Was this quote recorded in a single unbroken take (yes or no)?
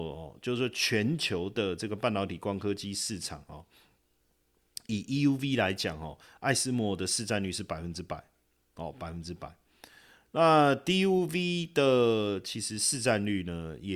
yes